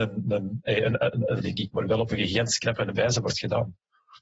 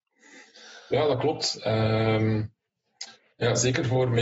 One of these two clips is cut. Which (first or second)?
first